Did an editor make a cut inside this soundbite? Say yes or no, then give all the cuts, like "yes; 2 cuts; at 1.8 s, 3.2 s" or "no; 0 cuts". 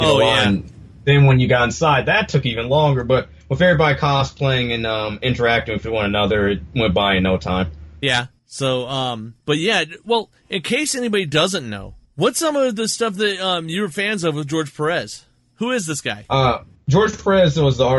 yes; 1 cut; at 9.4 s